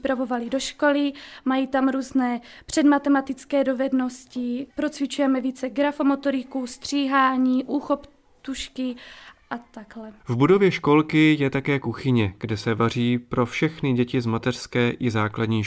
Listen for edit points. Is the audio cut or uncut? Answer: uncut